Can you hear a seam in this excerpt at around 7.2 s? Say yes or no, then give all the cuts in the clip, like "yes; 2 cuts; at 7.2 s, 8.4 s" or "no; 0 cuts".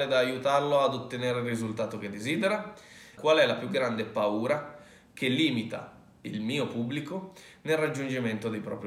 no; 1 cut; at 3.2 s